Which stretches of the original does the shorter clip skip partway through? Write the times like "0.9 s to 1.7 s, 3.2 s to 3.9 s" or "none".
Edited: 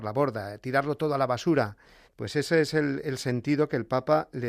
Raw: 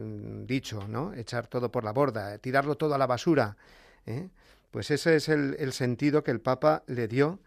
3.9 s to 4.6 s